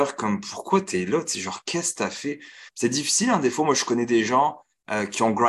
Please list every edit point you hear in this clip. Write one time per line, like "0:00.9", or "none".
0:02.7